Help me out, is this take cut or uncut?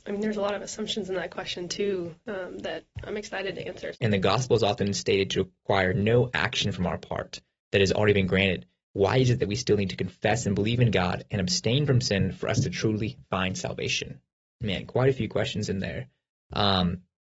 cut